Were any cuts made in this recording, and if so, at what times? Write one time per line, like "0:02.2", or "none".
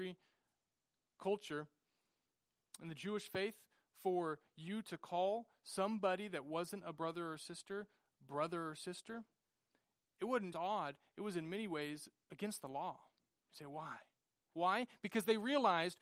0:10.5
0:14.5